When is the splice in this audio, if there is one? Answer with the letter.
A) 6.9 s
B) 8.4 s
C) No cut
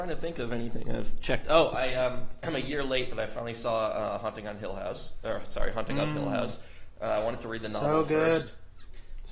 C